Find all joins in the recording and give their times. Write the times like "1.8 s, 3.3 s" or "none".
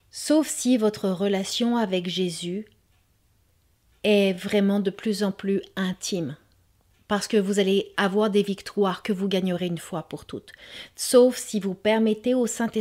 none